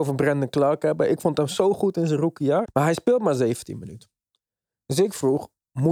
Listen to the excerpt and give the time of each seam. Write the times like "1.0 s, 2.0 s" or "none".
2.6 s